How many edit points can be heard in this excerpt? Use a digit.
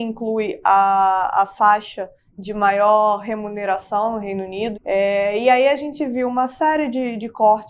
1